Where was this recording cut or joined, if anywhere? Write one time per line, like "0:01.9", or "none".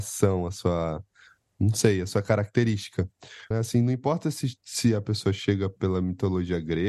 0:03.5